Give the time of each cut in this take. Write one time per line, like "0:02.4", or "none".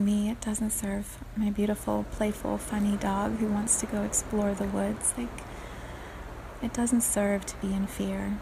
none